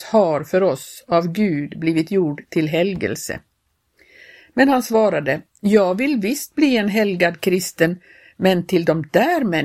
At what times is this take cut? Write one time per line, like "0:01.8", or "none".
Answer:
none